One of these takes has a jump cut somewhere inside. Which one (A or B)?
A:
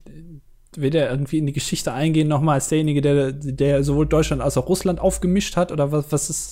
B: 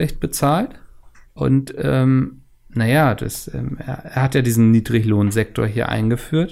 B